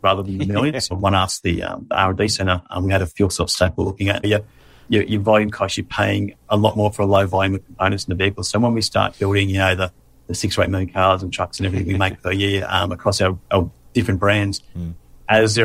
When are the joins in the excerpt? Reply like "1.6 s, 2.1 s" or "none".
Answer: 0.9 s, 4.2 s